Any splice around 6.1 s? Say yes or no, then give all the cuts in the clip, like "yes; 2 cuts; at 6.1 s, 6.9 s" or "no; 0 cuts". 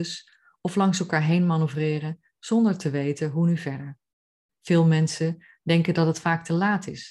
no; 1 cut; at 4.4 s